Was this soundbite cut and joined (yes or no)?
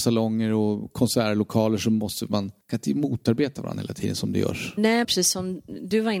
yes